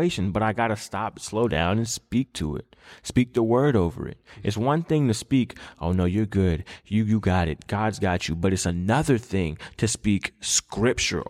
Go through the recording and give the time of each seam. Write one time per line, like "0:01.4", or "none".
none

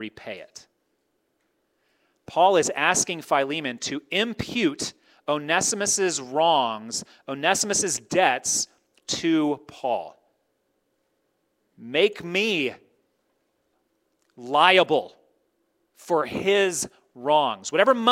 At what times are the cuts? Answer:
none

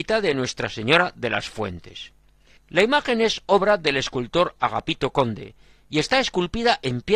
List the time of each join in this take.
0:02.6

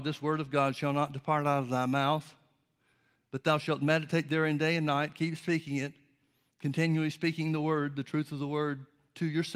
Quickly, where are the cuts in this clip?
none

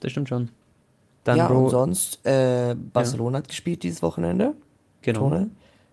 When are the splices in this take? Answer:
0:01.2

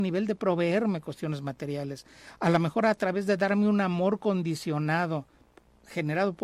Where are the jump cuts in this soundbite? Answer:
none

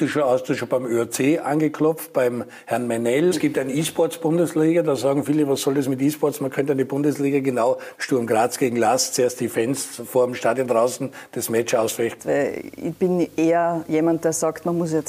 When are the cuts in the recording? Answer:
0:03.3
0:07.9
0:12.2

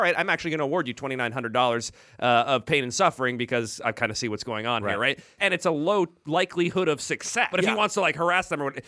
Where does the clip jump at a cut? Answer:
0:05.4
0:07.5

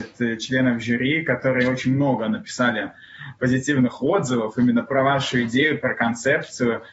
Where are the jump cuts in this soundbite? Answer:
none

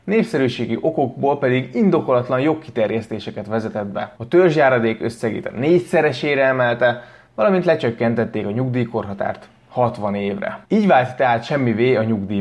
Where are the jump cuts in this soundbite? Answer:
0:04.2
0:10.6

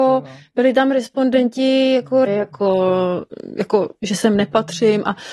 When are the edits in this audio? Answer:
0:02.3

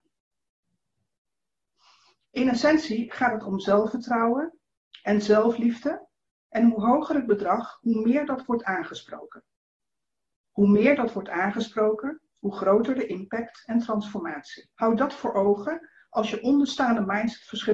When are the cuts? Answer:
0:14.7

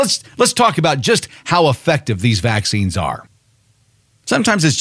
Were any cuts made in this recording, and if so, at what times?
none

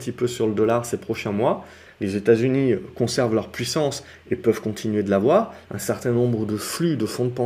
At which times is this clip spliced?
0:01.9
0:05.7

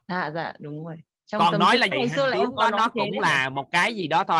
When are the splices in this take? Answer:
0:01.9

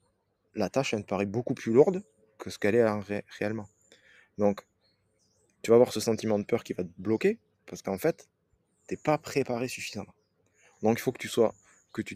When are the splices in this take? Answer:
none

